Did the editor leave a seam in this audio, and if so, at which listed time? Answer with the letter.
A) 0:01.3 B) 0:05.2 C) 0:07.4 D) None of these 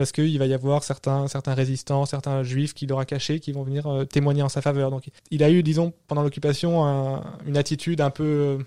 B